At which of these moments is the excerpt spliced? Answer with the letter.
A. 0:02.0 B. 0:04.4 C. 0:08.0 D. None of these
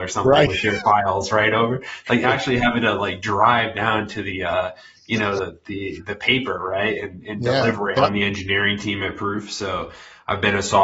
C